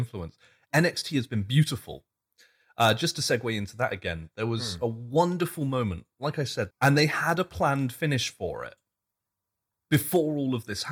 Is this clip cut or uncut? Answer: cut